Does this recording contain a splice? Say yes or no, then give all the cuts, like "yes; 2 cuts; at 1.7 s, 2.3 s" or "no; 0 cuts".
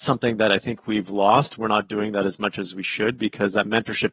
no; 0 cuts